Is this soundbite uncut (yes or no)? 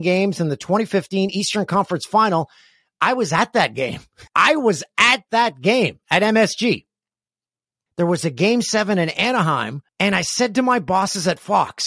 no